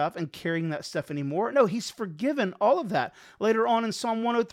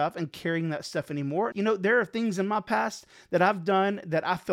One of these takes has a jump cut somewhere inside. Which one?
second; 1 cut; at 1.5 s

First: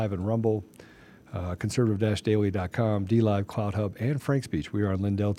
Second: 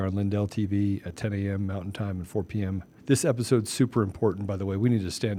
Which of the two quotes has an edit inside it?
second; 1 cut; at 3.0 s

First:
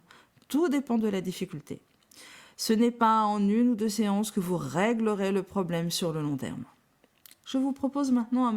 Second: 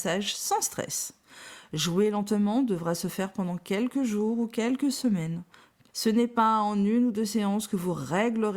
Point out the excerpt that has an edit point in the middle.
second; 1 cut; at 5.9 s

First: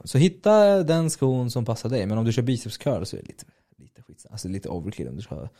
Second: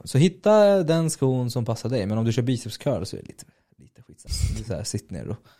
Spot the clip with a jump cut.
second; 1 cut; at 4.3 s

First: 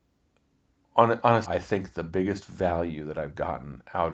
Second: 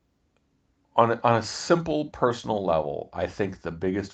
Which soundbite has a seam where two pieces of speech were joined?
first; 1 cut; at 1.4 s

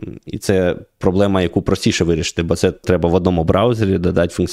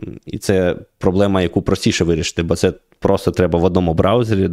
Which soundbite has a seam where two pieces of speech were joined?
first; 1 cut; at 2.8 s

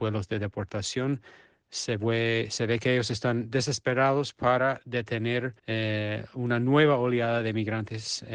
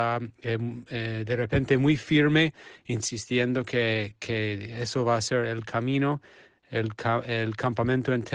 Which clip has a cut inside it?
first; 1 cut; at 5.6 s

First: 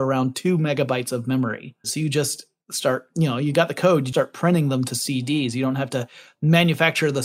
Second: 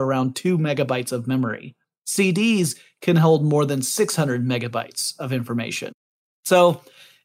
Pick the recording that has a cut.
first; 2 cuts; at 1.8 s, 4.1 s

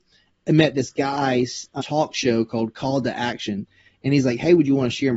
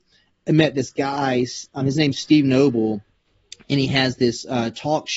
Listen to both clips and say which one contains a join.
first; 1 cut; at 1.8 s

